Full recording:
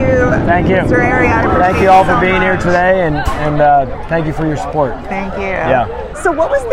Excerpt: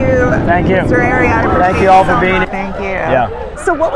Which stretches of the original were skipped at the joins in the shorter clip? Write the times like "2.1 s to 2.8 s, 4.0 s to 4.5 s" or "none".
2.4 s to 5.0 s

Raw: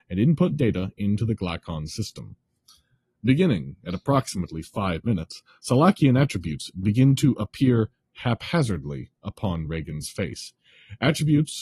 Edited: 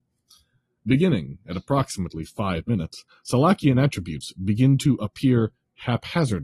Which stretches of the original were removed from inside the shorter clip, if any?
none

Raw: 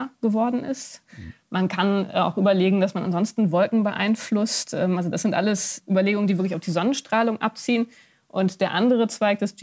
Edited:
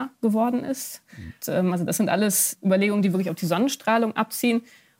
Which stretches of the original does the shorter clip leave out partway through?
1.4 s to 4.7 s

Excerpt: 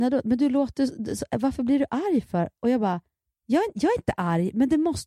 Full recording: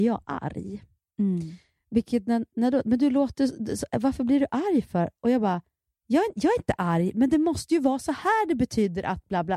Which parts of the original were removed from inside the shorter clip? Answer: none

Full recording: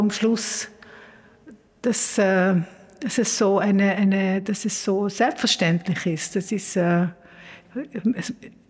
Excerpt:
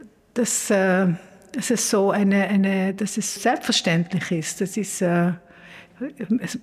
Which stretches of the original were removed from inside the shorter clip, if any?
4.8 s to 5.1 s

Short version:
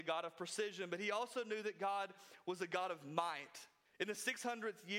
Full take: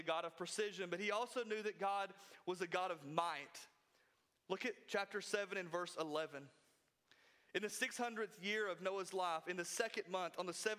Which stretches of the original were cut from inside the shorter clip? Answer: 3.9 s to 7.4 s

